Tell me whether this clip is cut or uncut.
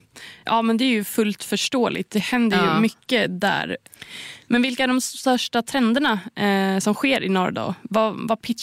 uncut